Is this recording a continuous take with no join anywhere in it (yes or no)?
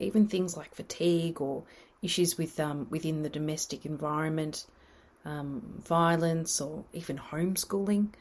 yes